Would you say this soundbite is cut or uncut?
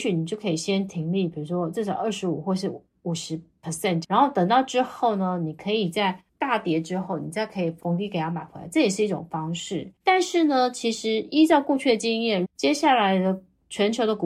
cut